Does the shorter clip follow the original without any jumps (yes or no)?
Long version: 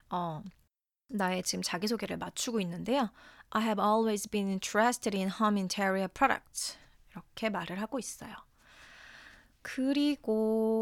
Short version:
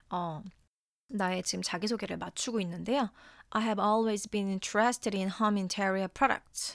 yes